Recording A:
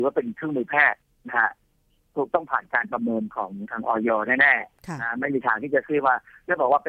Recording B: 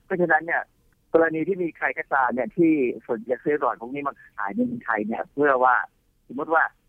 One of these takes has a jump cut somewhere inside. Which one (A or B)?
B